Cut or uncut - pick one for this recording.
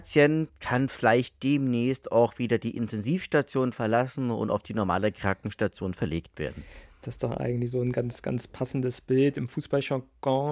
uncut